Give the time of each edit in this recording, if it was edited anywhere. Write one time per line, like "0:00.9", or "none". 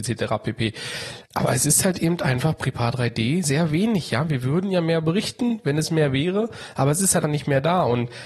0:01.2
0:03.4
0:07.2